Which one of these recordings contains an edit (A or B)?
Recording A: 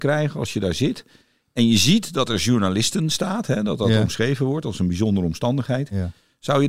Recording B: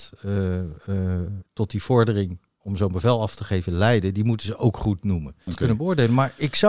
B